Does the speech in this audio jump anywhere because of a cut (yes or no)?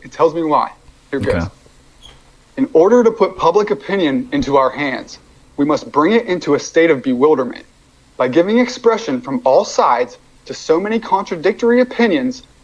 no